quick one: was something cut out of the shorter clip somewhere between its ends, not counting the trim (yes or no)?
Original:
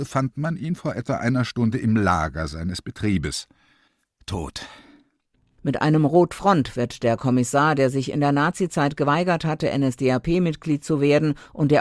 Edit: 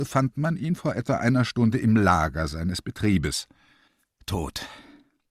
no